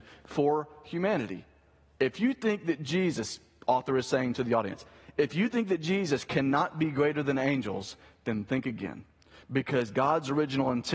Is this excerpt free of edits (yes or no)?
no